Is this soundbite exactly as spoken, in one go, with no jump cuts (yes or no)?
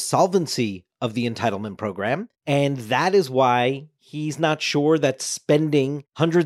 yes